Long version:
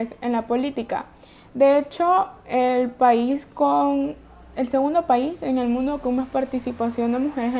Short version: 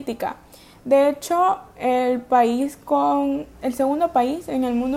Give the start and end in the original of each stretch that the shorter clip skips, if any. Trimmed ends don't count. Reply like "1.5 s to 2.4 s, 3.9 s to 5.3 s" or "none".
4.2 s to 4.5 s